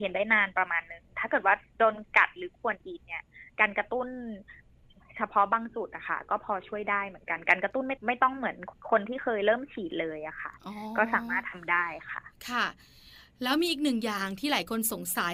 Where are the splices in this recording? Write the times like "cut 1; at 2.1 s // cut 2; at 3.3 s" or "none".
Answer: none

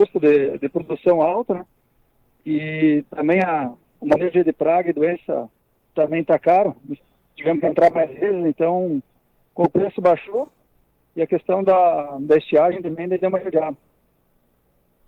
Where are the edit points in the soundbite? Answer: none

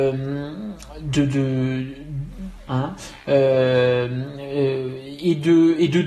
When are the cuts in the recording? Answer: cut 1; at 2.7 s

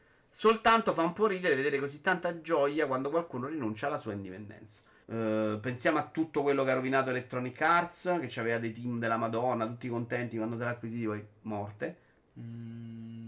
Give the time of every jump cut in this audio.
cut 1; at 5.0 s // cut 2; at 12.2 s

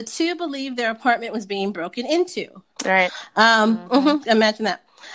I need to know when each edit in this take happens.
cut 1; at 2.8 s

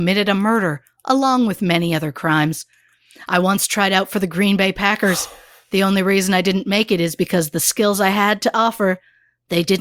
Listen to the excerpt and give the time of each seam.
none

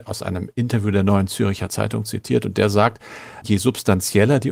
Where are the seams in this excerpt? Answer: cut 1; at 3.4 s

